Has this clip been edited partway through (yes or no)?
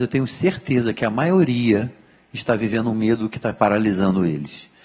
no